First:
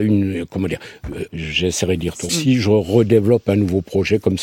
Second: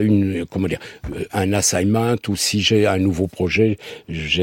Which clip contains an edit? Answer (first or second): first